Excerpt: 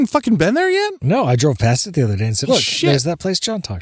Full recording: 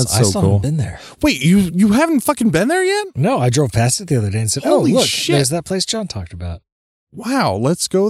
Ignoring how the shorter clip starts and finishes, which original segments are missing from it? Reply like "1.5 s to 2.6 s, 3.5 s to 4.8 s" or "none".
4.6 s to 4.9 s